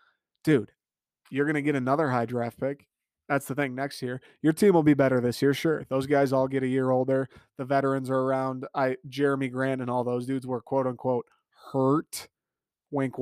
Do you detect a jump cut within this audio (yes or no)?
no